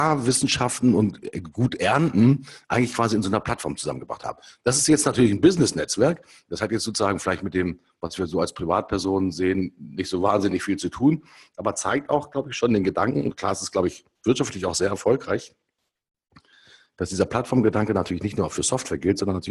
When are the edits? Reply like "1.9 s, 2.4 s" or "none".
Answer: none

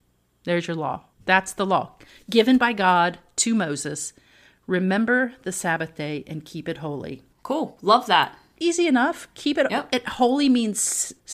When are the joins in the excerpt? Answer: 1.1 s

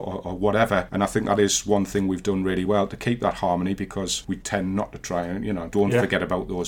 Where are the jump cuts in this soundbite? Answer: none

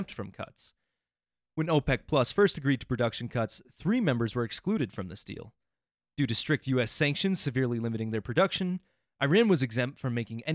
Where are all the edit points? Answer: none

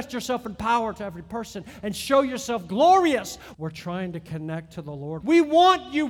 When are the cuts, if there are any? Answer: 3.5 s, 5.2 s

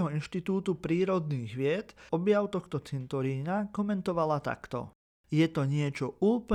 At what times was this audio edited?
2.1 s

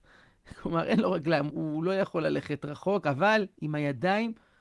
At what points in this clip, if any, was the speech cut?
1.5 s

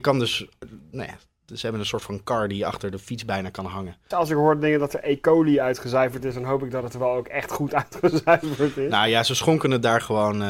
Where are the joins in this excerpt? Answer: 4.1 s

